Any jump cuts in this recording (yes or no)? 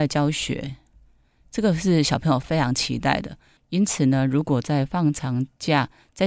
yes